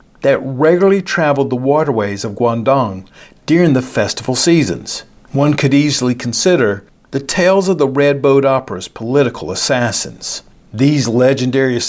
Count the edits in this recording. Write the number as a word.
two